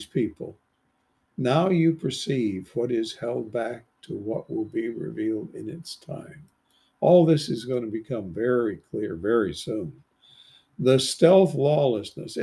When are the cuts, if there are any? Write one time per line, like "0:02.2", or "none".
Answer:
none